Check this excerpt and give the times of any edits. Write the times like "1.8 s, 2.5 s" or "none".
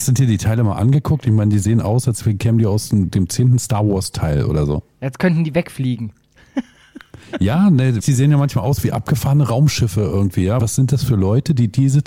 8.0 s, 10.6 s